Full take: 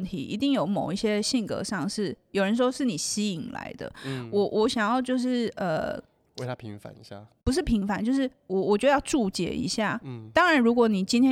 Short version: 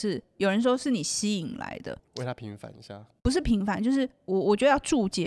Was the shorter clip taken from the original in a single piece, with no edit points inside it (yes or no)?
no